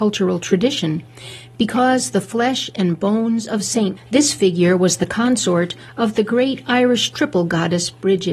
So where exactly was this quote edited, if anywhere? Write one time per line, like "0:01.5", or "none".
0:04.0